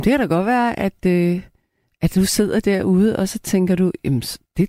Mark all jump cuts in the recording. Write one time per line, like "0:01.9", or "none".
none